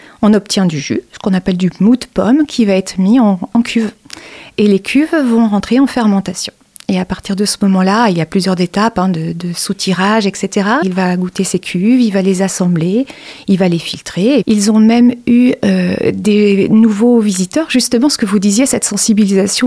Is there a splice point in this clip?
yes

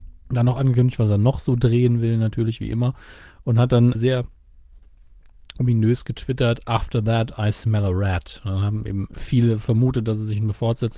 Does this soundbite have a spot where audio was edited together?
yes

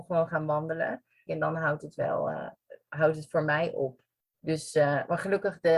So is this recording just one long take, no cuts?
no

